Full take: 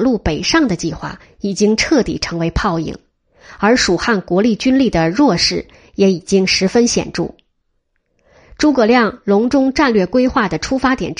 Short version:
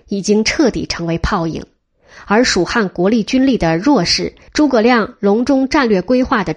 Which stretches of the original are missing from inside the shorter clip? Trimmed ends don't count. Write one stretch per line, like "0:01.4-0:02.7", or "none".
0:05.8-0:08.5